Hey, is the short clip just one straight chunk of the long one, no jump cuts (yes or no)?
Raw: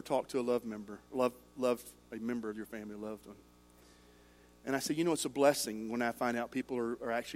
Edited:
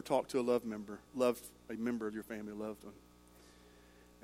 no